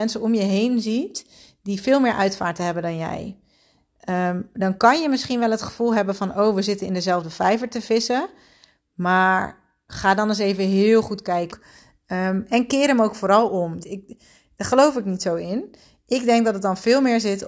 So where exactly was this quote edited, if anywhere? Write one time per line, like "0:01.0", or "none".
0:11.5
0:13.8